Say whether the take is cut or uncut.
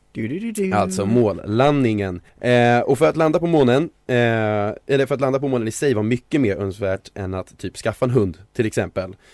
cut